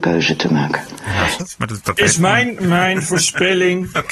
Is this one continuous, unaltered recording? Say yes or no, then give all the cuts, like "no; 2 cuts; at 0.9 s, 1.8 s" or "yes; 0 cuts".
no; 2 cuts; at 1.4 s, 2.6 s